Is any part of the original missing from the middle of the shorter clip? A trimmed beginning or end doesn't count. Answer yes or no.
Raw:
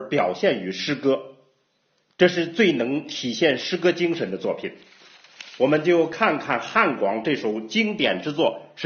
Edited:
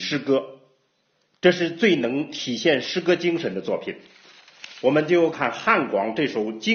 yes